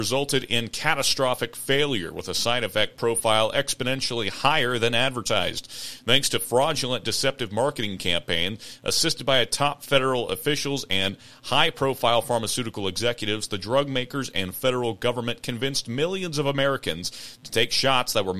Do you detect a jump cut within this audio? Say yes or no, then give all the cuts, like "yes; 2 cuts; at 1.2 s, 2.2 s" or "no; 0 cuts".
no; 0 cuts